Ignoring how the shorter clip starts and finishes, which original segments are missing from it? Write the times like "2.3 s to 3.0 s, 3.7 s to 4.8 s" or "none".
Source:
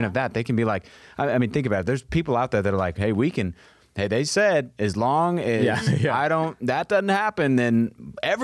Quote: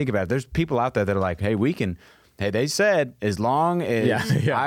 none